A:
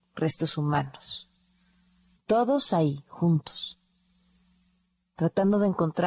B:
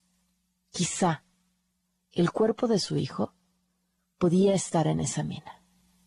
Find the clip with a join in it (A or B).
A